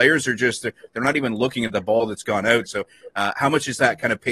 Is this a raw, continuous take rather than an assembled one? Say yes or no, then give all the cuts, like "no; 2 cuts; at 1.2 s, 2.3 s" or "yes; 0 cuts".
no; 1 cut; at 2.7 s